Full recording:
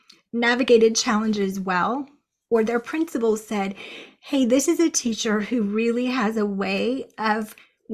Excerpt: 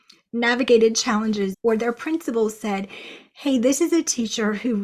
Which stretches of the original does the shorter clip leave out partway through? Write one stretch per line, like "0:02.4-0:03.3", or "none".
0:01.5-0:02.4